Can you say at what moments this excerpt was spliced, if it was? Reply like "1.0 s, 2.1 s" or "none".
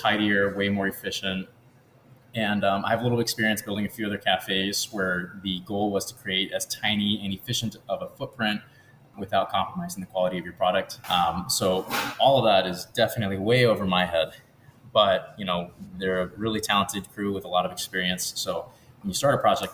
11.0 s